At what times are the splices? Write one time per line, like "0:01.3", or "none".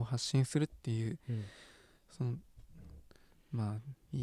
none